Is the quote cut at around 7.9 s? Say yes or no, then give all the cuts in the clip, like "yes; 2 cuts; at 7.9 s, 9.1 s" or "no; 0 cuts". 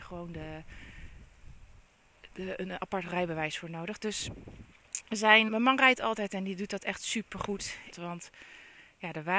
yes; 2 cuts; at 5.5 s, 7.9 s